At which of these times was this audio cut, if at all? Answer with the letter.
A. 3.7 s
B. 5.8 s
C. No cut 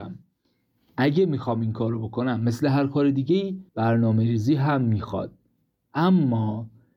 A